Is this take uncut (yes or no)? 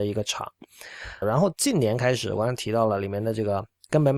no